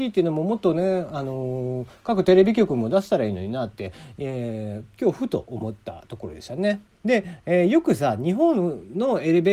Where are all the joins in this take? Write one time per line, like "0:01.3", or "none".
0:06.9